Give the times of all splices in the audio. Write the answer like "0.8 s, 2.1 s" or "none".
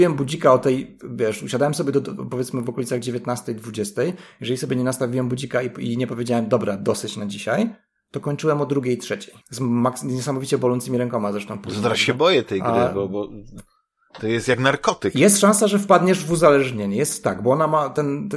9.4 s